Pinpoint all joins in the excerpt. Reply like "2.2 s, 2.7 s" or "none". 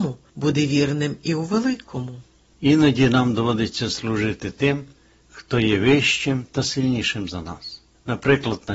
none